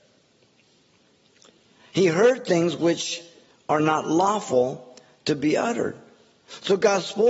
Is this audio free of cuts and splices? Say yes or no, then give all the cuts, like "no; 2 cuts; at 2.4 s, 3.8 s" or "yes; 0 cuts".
yes; 0 cuts